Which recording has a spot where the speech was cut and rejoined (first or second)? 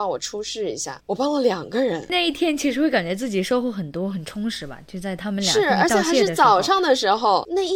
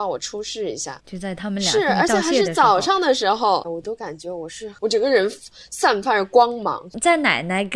second